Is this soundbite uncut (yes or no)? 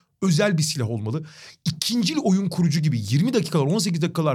yes